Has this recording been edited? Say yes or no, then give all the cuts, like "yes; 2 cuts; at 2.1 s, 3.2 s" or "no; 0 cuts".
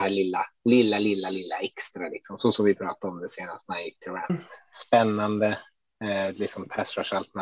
yes; 1 cut; at 4.3 s